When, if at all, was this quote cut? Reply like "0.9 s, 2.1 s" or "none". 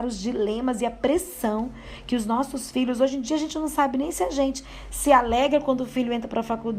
none